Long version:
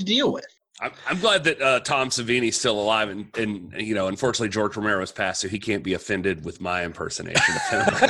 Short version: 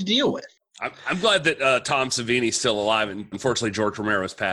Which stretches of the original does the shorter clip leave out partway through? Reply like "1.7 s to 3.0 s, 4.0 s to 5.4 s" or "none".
3.3 s to 4.1 s